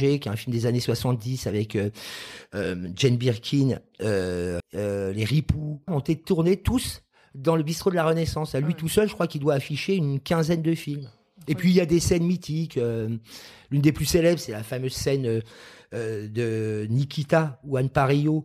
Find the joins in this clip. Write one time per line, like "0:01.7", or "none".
0:04.6
0:05.9